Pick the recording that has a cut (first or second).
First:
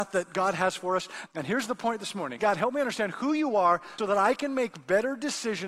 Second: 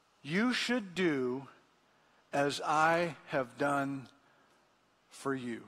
first